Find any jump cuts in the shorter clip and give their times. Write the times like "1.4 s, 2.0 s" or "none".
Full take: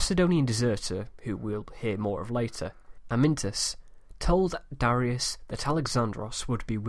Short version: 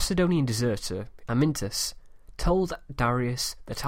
1.2 s